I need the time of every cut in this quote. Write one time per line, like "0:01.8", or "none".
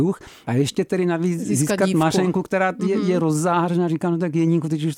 none